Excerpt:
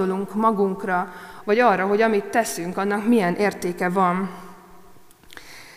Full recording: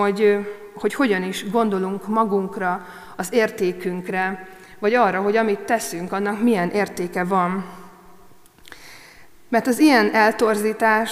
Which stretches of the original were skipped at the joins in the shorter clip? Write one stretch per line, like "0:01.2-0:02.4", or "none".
0:03.2-0:04.8